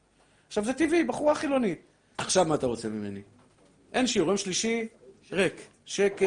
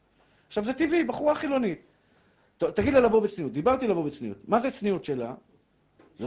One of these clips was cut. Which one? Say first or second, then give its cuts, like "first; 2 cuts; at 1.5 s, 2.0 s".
first; 1 cut; at 2.1 s